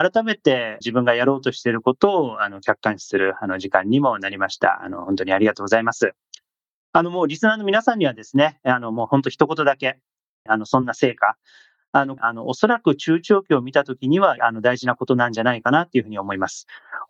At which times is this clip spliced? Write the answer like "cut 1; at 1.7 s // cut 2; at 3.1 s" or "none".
cut 1; at 10.5 s // cut 2; at 12.2 s // cut 3; at 14.4 s